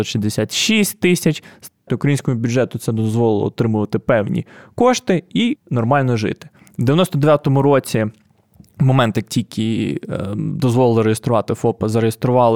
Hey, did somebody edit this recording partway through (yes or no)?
yes